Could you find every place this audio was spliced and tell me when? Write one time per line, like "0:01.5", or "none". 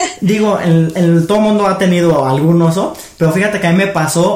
none